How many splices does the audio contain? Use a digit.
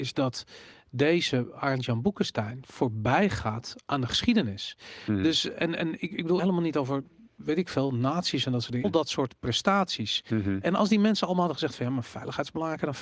2